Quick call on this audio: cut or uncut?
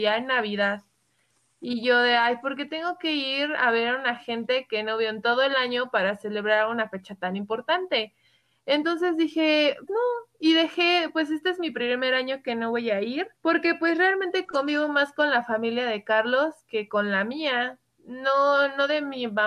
cut